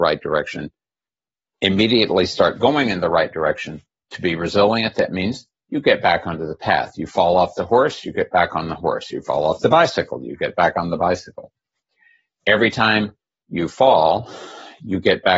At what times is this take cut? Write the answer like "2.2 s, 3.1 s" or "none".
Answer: 4.1 s